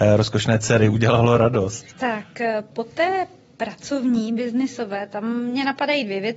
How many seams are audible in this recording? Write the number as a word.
one